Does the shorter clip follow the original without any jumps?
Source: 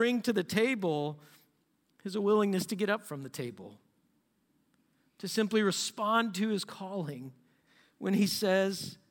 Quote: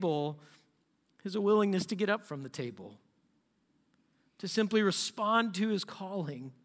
yes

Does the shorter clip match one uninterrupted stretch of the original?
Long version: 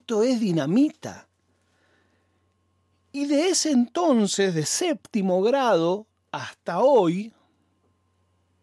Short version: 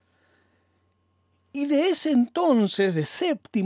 yes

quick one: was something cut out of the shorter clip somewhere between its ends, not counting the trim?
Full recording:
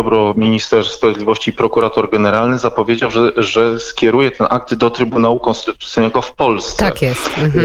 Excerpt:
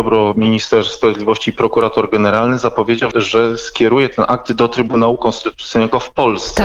yes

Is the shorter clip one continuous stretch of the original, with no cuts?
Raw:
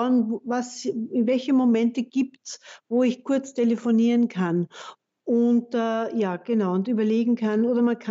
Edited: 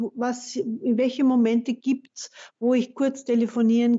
yes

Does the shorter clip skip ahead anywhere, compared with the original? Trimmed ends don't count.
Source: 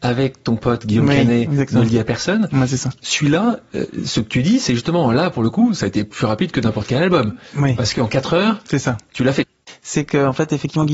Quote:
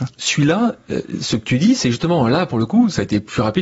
no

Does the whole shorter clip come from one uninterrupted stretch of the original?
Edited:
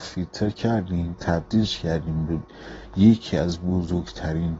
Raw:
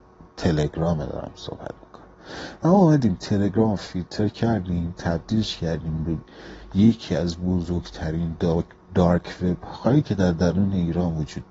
yes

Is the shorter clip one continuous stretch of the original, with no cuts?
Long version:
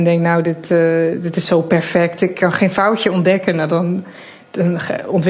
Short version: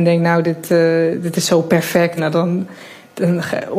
no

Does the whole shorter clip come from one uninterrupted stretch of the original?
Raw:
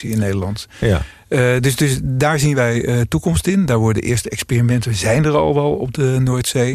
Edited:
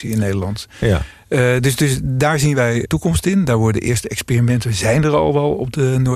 no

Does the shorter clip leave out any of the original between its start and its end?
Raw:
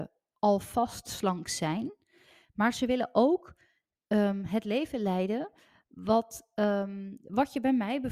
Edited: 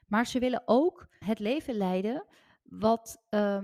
yes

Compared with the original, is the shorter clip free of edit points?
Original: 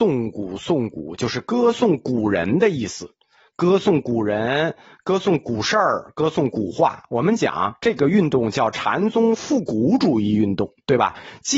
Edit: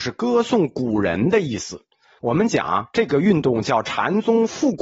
no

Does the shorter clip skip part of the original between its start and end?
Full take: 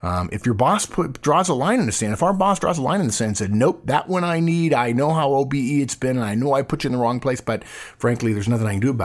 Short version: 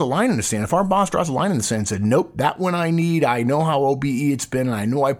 no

